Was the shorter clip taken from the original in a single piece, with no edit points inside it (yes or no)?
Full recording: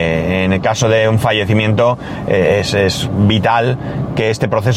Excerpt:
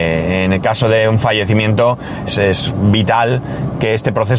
no